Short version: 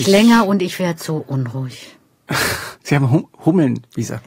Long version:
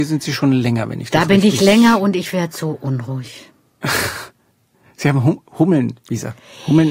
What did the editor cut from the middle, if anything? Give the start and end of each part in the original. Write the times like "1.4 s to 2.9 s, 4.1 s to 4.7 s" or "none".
4.3 s to 4.9 s